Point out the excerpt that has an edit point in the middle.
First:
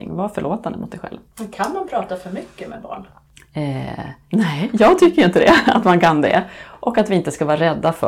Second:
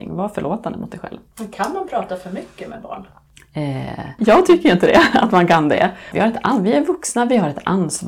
second; 2 cuts; at 4.2 s, 6.1 s

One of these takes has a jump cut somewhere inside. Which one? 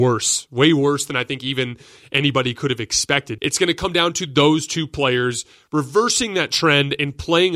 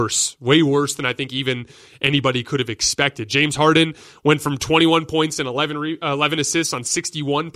first; 1 cut; at 3.4 s

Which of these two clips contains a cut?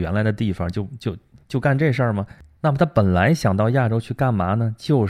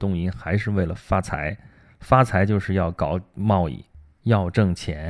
first; 1 cut; at 2.6 s

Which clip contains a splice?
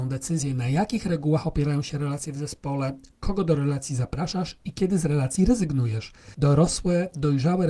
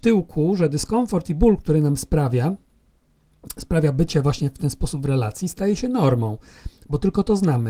first; 1 cut; at 6.3 s

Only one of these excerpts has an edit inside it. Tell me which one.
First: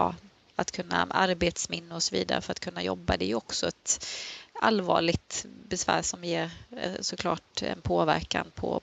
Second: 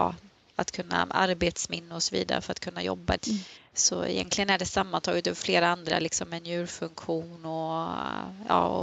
second; 1 cut; at 3.2 s

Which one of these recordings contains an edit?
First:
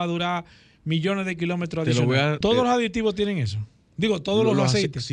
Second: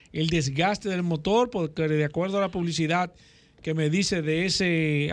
first; 1 cut; at 2.4 s

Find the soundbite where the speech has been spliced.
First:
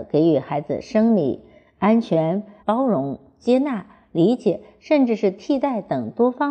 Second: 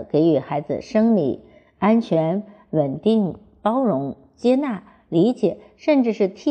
first; 1 cut; at 2.6 s

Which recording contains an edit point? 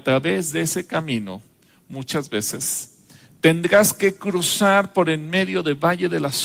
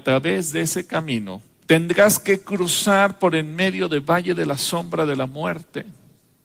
second; 1 cut; at 1.6 s

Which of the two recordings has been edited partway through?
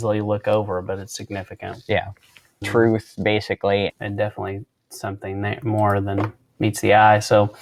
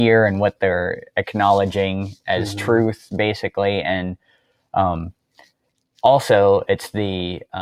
first; 2 cuts; at 2.6 s, 3.9 s

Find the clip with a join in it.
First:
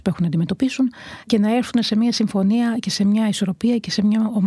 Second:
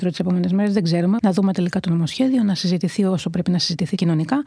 second; 1 cut; at 1.2 s

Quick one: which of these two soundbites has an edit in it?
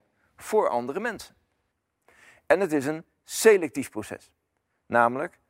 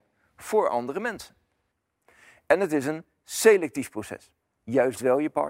second; 1 cut; at 4.4 s

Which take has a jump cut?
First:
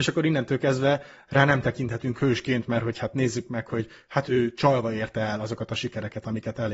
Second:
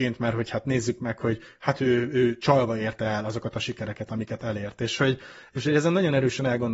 first; 1 cut; at 4.3 s

